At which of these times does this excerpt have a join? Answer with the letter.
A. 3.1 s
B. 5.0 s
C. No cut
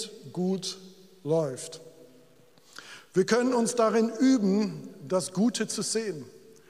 C